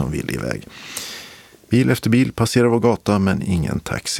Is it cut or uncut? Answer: uncut